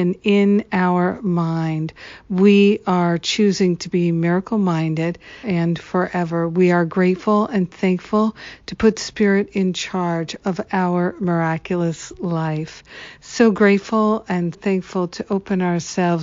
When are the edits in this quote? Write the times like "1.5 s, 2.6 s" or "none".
5.4 s, 14.5 s

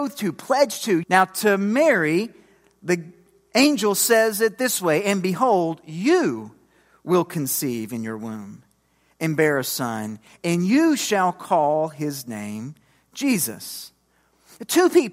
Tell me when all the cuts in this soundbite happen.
1.0 s

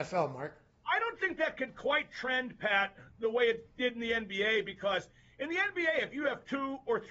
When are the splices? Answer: none

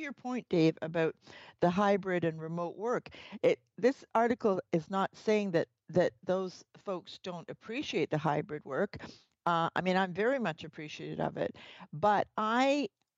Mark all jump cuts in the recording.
none

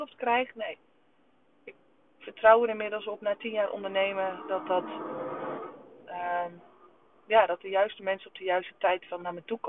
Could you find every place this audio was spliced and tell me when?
none

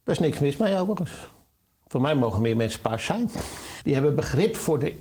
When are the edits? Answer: 3.8 s

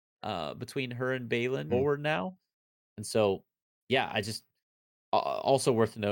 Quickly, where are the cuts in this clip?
1.7 s, 3.8 s

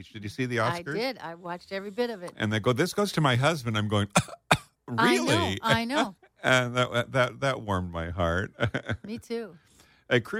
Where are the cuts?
6.2 s

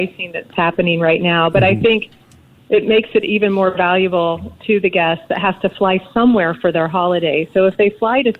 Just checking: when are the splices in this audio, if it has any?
none

